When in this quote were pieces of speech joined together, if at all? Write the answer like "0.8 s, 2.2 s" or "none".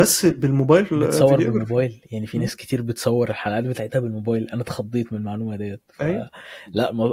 none